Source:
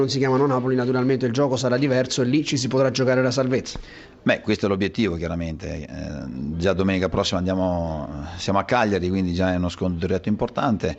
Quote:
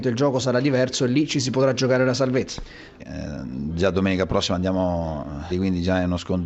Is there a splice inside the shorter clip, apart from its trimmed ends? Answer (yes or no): yes